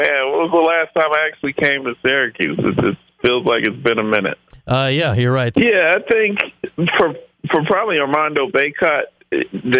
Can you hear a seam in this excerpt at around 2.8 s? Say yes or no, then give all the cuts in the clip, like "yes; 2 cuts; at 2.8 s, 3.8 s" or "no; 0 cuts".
no; 1 cut; at 5.5 s